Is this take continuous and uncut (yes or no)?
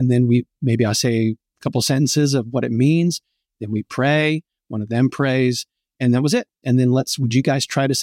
no